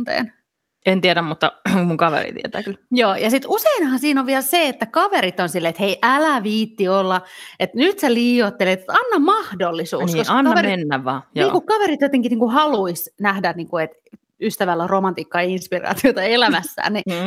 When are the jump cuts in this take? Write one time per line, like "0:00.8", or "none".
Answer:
none